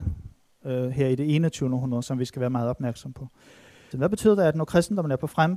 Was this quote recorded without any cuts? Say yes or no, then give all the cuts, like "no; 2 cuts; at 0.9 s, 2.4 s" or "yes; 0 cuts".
no; 1 cut; at 3.9 s